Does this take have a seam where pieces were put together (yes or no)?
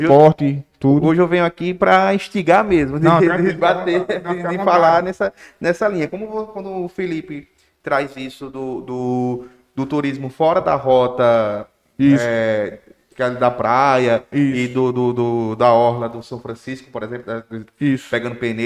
no